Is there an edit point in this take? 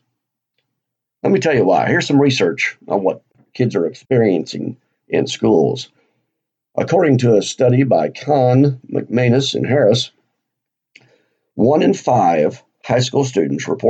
no; 0 cuts

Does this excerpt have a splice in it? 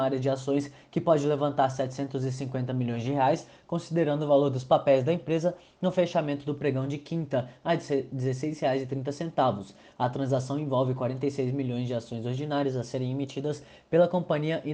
no; 0 cuts

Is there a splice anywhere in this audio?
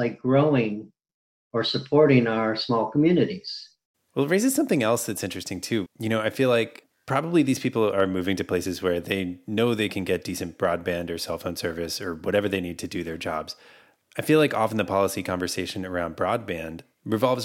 yes; 2 cuts; at 3.9 s, 5.9 s

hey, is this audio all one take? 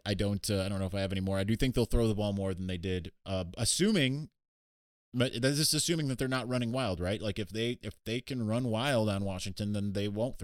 yes; 0 cuts

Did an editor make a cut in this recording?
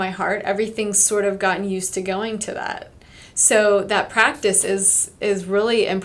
no; 0 cuts

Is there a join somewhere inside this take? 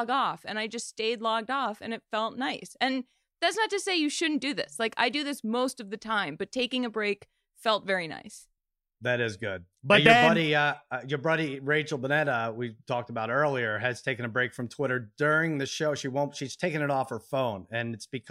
no; 0 cuts

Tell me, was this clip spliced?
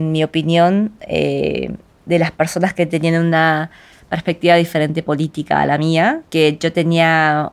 yes; 1 cut; at 6.3 s

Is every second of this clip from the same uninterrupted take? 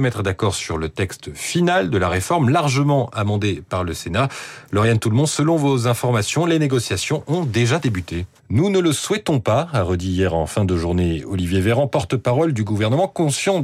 no; 1 cut; at 8.4 s

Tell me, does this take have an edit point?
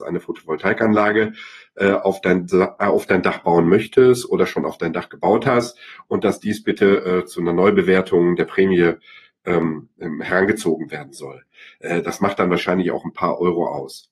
no; 0 cuts

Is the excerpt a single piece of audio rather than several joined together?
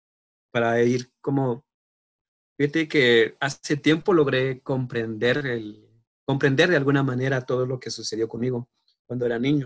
yes; 0 cuts

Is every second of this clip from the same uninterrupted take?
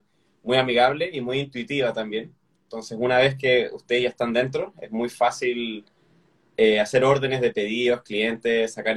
yes; 0 cuts

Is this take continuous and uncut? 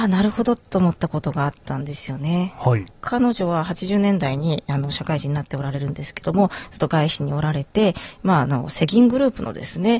no; 1 cut; at 2.9 s

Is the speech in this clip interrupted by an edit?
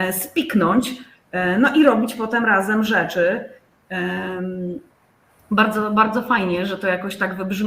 no; 0 cuts

